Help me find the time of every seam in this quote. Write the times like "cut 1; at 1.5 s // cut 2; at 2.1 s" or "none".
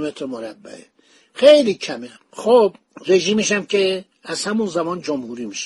none

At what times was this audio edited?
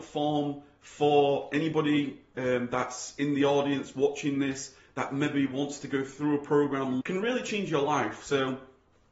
cut 1; at 7.0 s

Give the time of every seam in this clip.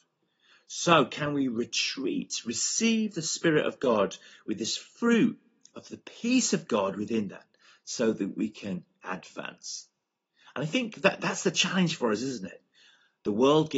none

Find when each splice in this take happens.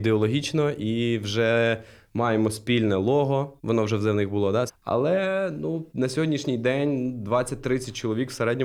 cut 1; at 3.6 s // cut 2; at 4.7 s // cut 3; at 5.9 s

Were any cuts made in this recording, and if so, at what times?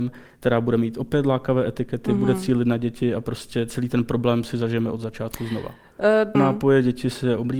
cut 1; at 6.3 s

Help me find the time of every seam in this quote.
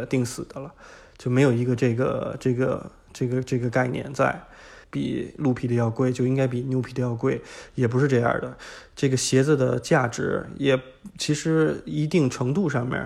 cut 1; at 4.8 s

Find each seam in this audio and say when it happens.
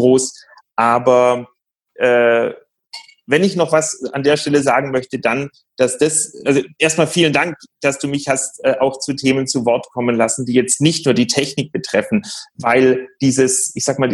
none

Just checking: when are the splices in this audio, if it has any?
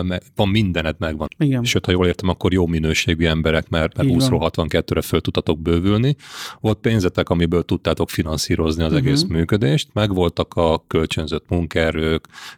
cut 1; at 1.3 s

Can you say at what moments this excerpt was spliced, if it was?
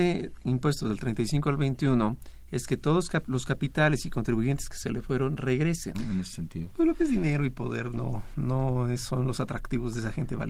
cut 1; at 5.9 s

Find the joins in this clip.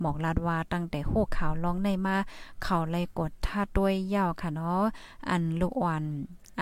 cut 1; at 3.7 s

